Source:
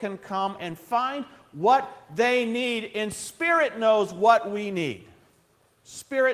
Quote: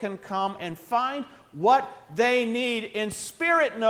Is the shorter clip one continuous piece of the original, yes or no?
yes